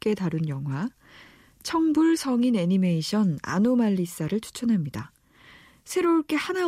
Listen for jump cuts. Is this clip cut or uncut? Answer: uncut